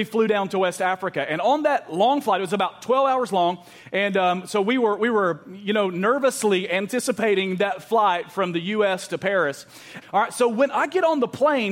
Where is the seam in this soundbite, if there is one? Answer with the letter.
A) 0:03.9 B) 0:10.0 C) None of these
B